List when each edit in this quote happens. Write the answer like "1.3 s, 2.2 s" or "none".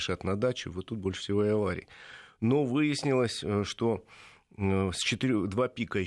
none